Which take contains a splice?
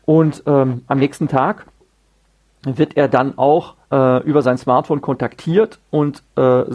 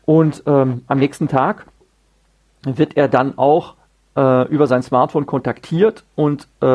first; 1 cut; at 3.8 s

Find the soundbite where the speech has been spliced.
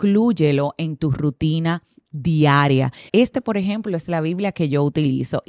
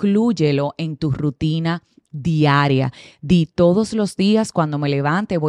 first; 1 cut; at 3.1 s

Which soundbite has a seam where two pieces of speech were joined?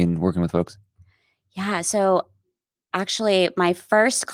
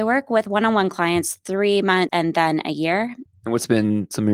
second; 2 cuts; at 2.1 s, 3.3 s

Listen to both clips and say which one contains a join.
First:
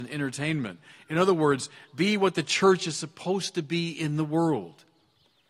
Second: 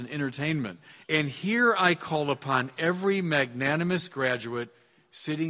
second; 1 cut; at 1.0 s

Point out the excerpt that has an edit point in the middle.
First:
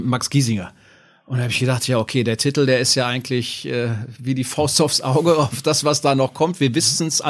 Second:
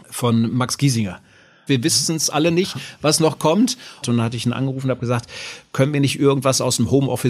second; 2 cuts; at 1.7 s, 4.0 s

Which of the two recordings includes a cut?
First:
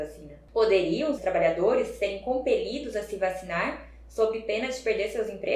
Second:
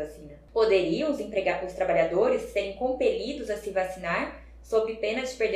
first; 1 cut; at 1.2 s

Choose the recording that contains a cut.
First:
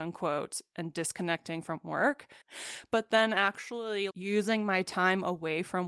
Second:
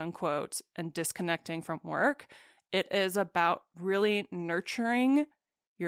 first; 2 cuts; at 2.4 s, 4.1 s

